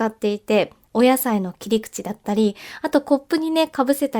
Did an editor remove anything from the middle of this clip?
no; 0 cuts

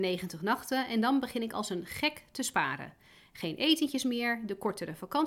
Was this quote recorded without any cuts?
yes; 0 cuts

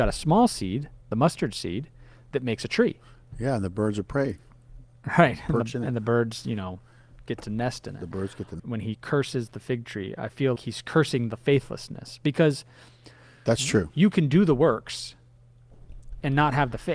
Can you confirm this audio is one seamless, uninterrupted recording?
no; 2 cuts; at 8.6 s, 10.6 s

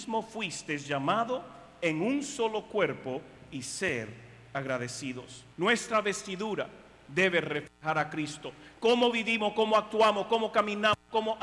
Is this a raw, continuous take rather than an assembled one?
no; 1 cut; at 5.5 s

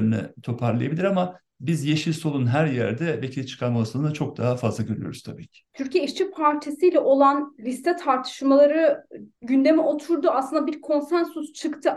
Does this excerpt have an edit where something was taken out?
no; 0 cuts

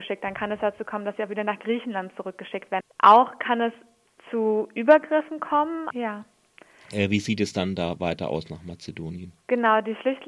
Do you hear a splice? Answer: yes; 2 cuts; at 2.8 s, 5.9 s

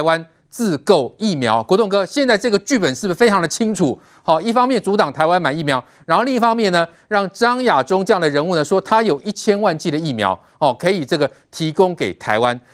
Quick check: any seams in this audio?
no; 0 cuts

